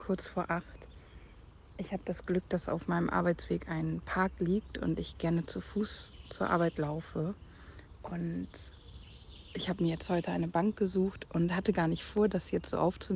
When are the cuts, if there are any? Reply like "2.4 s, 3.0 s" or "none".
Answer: 8.0 s